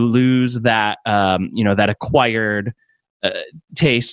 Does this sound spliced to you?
no; 0 cuts

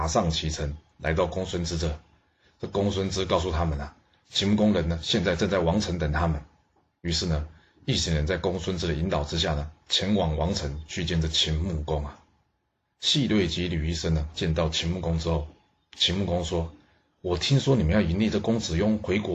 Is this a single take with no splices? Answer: yes; 0 cuts

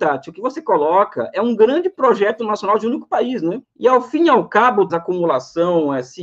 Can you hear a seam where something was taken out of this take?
yes; 2 cuts; at 3.6 s, 4.9 s

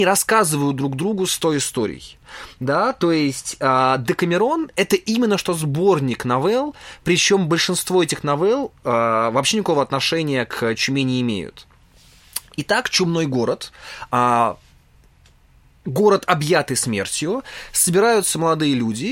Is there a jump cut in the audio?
no; 0 cuts

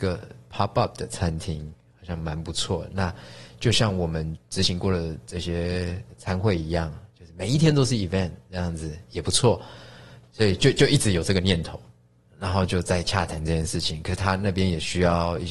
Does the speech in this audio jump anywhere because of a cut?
no; 0 cuts

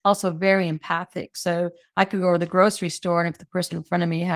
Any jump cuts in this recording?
no; 0 cuts

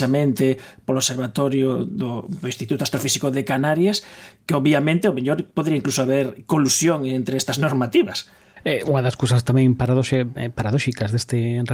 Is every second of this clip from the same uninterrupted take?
yes; 0 cuts

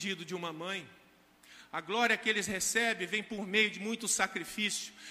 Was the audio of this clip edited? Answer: no; 0 cuts

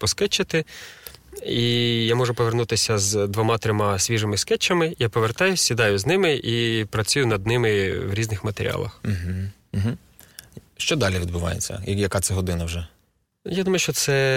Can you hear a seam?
no; 0 cuts

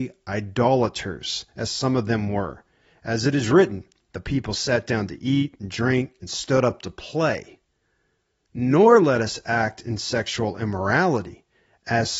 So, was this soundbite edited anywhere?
no; 0 cuts

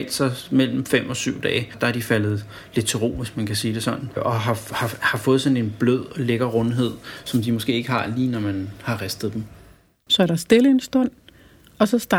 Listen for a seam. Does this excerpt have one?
yes; 1 cut; at 10.1 s

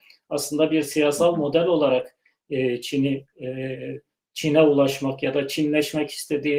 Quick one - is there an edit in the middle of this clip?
no; 0 cuts

